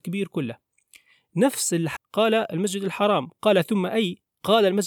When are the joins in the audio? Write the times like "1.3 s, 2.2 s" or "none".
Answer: 2.0 s